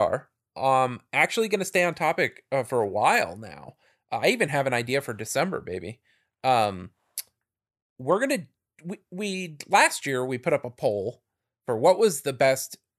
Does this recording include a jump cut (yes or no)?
no